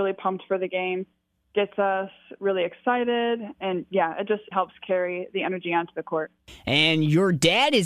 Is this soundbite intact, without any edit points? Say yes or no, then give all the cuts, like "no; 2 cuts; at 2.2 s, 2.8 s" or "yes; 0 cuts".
no; 1 cut; at 4.5 s